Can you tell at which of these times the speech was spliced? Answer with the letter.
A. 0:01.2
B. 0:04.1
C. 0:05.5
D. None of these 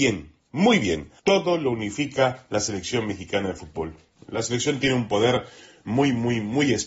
A